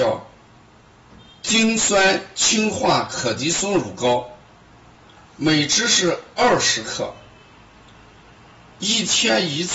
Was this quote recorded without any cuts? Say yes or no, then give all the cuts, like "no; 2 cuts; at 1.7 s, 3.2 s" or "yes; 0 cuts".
yes; 0 cuts